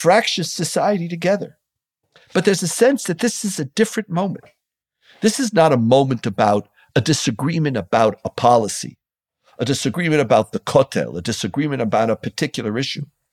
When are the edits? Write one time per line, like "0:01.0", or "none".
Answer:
none